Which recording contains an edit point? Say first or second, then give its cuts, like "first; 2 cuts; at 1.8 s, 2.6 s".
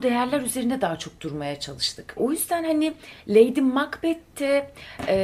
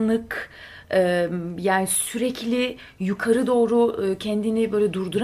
first; 1 cut; at 2.2 s